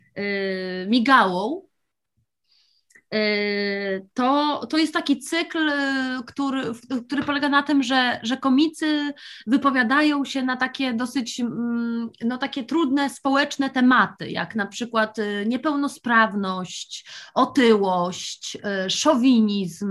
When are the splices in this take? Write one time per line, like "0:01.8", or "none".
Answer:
none